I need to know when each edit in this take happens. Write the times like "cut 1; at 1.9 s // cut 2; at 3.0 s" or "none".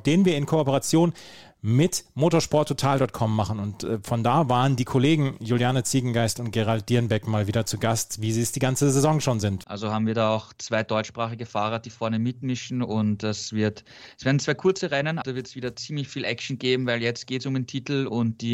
cut 1; at 9.6 s // cut 2; at 15.2 s